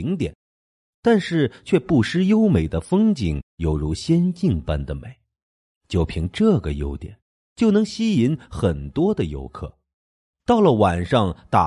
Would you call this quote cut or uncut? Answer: cut